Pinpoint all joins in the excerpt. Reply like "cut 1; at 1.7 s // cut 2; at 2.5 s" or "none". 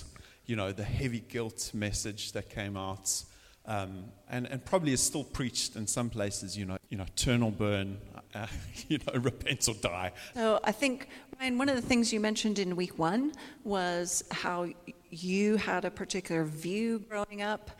cut 1; at 6.8 s // cut 2; at 10.3 s